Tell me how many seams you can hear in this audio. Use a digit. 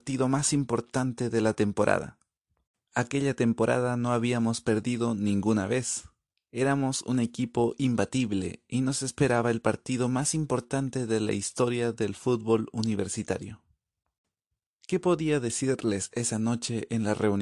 1